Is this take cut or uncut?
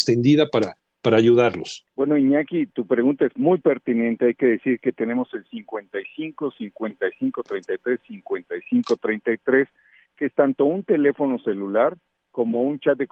uncut